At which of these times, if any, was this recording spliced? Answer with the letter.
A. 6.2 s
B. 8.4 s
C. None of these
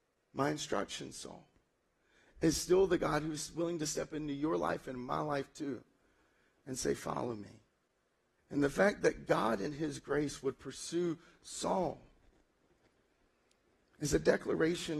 B